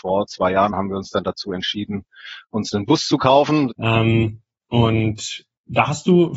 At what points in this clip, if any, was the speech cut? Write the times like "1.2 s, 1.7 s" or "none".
3.7 s